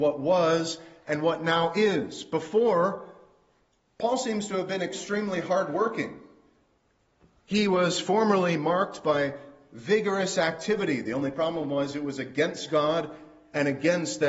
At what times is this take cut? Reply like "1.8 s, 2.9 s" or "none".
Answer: none